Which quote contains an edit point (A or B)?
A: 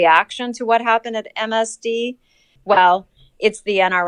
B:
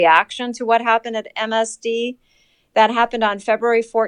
A